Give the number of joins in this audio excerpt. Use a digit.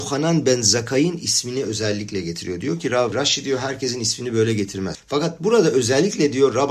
2